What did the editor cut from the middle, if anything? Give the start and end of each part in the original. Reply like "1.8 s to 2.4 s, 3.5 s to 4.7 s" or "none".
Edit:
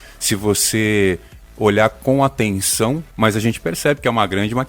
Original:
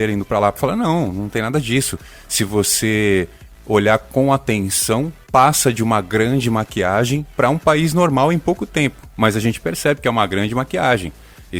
5.2 s to 9.1 s